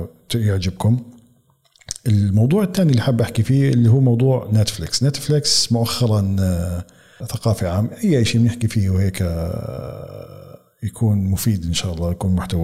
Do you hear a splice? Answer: yes; 1 cut; at 7.2 s

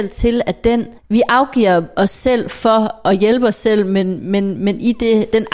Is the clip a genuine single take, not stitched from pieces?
no; 1 cut; at 1.0 s

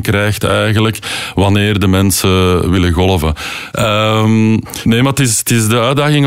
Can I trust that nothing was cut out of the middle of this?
no; 1 cut; at 3.7 s

